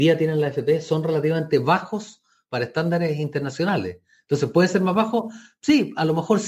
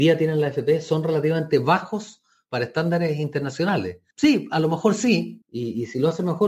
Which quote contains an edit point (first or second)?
second